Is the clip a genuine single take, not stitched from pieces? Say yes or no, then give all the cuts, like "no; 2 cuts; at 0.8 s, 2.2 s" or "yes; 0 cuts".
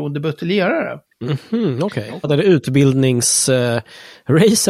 no; 1 cut; at 2.2 s